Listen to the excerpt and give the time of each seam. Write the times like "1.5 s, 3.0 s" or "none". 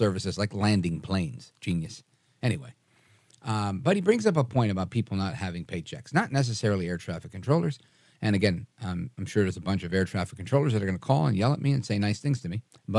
none